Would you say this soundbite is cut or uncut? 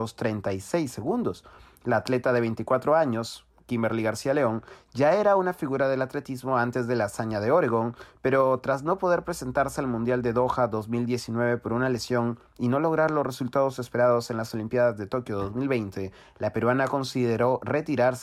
uncut